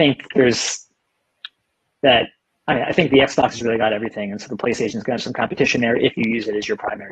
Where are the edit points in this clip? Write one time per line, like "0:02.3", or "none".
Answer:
none